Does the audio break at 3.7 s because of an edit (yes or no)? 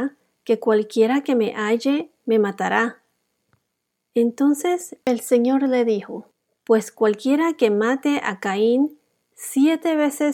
no